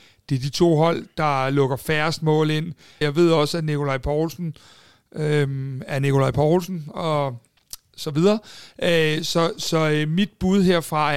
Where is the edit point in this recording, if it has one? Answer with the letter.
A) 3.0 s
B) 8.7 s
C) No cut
A